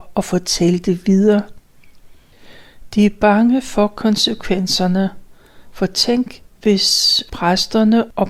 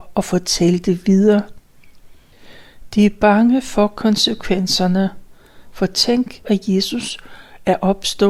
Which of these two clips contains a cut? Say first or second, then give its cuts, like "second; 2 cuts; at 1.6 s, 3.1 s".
second; 1 cut; at 6.4 s